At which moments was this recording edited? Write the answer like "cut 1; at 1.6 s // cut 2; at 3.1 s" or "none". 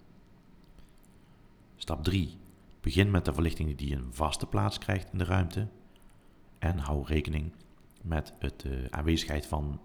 cut 1; at 2.8 s